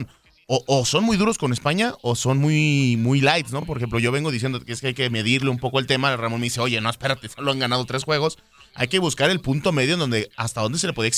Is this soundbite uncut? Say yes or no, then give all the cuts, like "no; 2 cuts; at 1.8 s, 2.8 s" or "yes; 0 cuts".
yes; 0 cuts